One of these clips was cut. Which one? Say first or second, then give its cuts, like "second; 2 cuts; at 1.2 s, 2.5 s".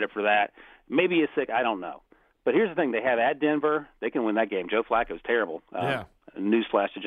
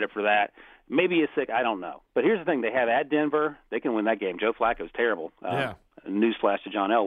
second; 1 cut; at 2.1 s